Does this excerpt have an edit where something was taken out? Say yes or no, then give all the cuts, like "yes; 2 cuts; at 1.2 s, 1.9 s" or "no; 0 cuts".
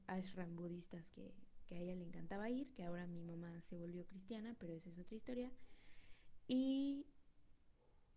no; 0 cuts